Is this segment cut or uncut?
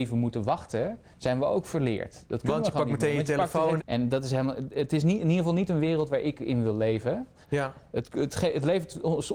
cut